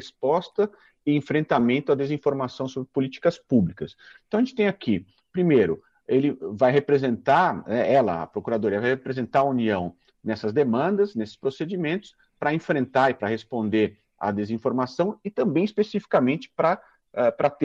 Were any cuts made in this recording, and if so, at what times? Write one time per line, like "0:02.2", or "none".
none